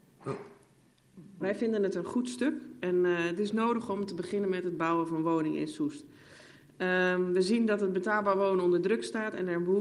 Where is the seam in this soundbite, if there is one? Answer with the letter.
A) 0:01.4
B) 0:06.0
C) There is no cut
A